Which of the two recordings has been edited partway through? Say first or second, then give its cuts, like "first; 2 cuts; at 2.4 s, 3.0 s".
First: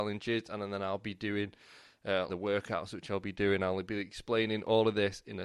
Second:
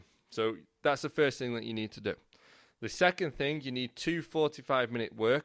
first; 1 cut; at 2.3 s